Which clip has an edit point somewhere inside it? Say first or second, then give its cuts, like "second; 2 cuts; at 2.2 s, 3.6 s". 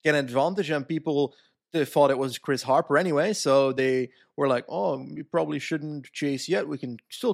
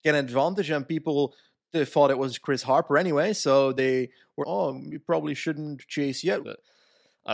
second; 2 cuts; at 4.4 s, 6.4 s